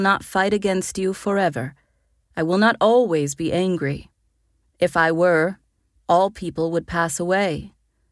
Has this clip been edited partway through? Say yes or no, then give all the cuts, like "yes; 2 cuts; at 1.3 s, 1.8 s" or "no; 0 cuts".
no; 0 cuts